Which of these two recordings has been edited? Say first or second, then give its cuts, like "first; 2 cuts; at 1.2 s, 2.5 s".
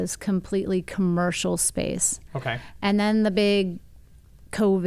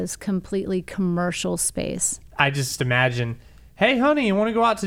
second; 1 cut; at 2.3 s